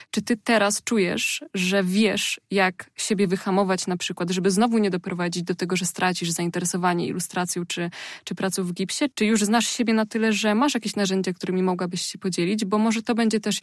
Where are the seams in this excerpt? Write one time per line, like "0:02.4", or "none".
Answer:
0:09.1